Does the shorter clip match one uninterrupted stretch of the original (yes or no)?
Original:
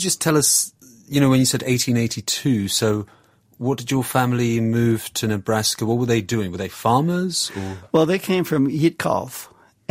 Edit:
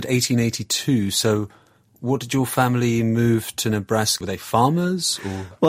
no